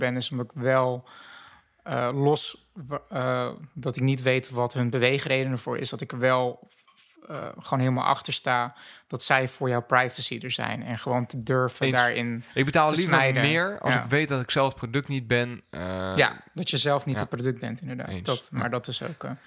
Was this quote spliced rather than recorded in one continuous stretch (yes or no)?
no